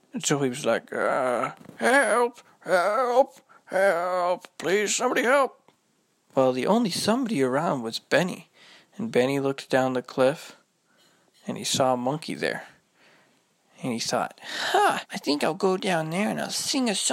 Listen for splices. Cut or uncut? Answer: cut